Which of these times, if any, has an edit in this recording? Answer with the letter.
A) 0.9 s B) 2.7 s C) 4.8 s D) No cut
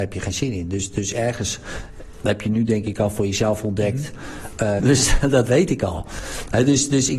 C